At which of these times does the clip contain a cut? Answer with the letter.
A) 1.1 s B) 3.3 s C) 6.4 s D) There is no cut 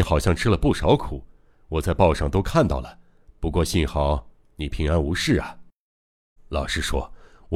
C